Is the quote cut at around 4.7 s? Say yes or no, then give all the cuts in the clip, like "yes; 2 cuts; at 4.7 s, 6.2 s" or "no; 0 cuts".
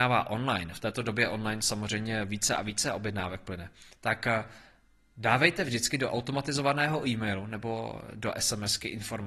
no; 0 cuts